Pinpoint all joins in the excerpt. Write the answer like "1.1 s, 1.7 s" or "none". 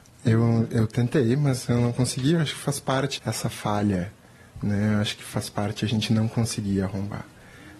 3.2 s